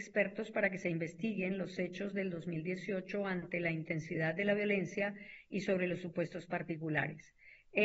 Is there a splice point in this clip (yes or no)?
no